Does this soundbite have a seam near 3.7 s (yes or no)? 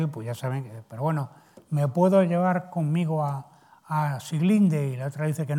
yes